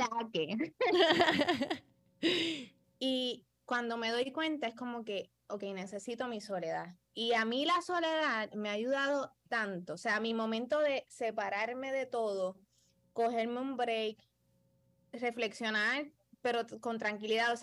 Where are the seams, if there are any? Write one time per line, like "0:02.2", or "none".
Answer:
0:02.8